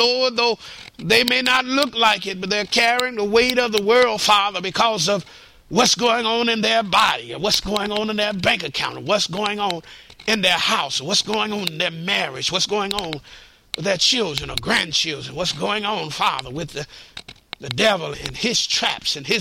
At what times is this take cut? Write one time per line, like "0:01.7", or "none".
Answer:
0:18.1